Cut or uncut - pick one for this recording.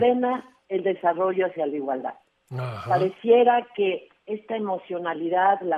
uncut